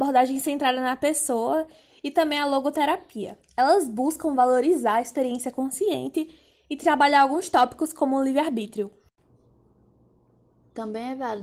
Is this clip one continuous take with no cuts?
yes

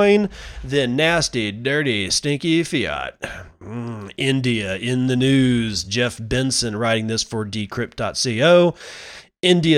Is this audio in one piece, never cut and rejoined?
yes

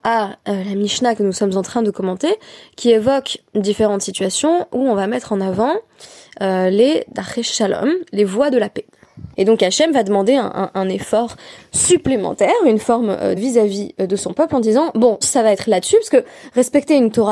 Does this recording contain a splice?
yes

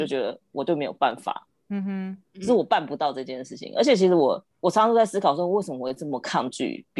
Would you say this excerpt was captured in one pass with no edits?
no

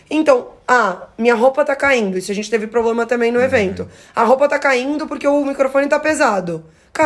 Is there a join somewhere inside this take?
no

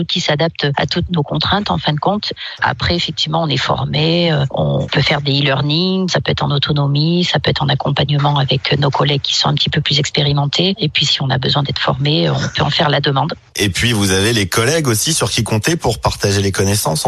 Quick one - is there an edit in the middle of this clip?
no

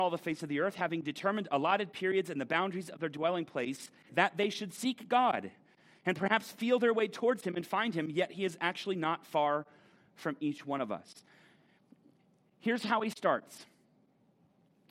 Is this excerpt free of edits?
no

